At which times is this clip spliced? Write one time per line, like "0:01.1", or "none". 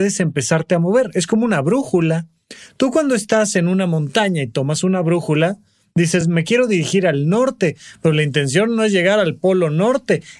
none

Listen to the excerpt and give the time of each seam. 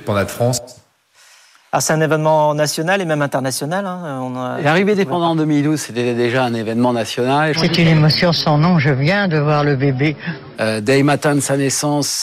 0:07.5
0:10.5

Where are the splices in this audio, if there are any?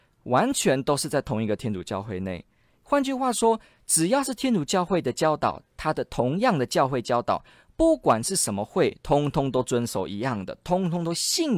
none

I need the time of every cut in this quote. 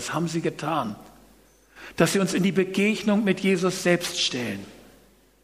none

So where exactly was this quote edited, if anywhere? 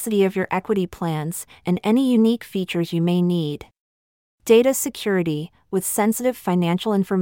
0:04.4

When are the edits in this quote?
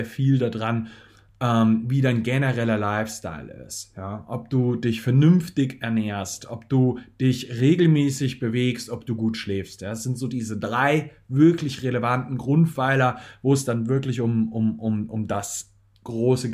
none

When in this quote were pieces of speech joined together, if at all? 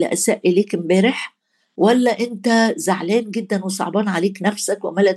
none

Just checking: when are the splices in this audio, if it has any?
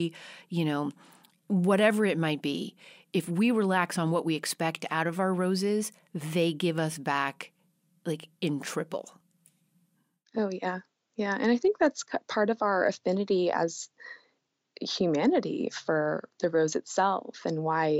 none

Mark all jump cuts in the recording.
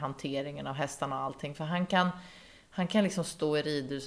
none

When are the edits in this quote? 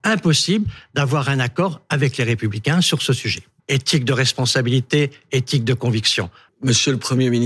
0:03.6
0:06.5

